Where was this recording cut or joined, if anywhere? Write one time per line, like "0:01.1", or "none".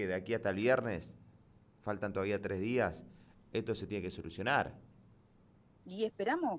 none

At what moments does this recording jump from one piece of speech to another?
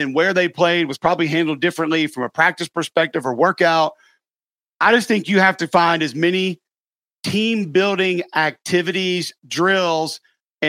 none

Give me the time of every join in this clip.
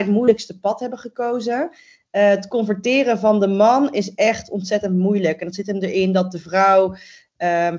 none

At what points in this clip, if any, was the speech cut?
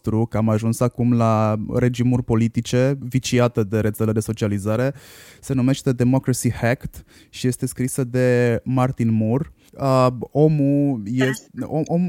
0:01.7
0:03.0
0:09.7

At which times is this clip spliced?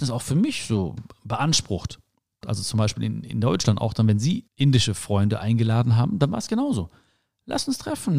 0:02.4
0:04.5

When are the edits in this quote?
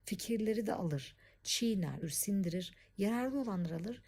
0:02.0

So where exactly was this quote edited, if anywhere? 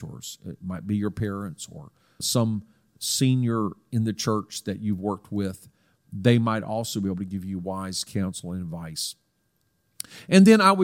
0:02.2

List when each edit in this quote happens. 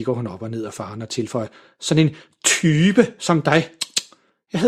none

